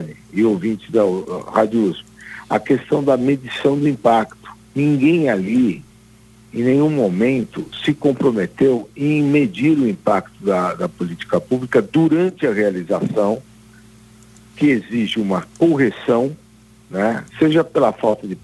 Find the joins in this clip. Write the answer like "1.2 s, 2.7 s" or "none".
17.3 s